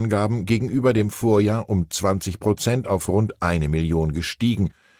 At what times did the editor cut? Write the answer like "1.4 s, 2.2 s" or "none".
none